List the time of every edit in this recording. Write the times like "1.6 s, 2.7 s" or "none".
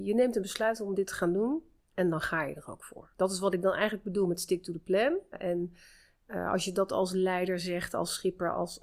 3.1 s, 5.3 s